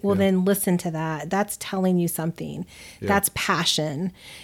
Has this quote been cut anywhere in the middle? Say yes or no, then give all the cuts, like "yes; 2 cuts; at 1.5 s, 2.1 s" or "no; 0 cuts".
no; 0 cuts